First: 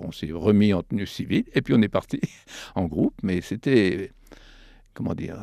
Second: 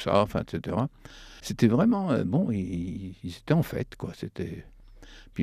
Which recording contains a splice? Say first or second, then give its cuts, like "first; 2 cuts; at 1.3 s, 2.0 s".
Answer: second; 1 cut; at 1.4 s